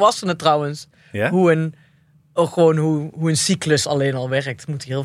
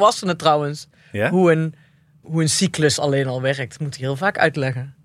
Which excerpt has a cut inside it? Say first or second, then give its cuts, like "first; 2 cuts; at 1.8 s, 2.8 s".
second; 1 cut; at 2.2 s